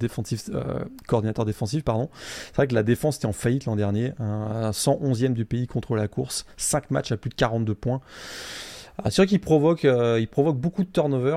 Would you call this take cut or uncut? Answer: uncut